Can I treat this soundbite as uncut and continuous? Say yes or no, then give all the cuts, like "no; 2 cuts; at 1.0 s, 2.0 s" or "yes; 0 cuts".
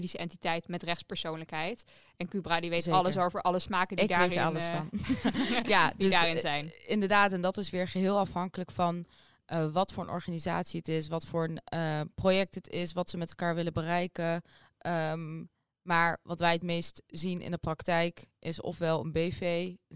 yes; 0 cuts